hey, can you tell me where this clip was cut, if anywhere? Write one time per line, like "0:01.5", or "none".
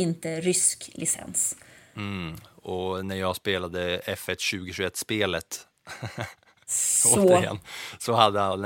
none